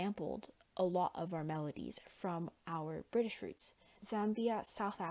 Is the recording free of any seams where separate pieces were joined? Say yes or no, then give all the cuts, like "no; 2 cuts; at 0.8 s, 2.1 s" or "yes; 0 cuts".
no; 1 cut; at 4.0 s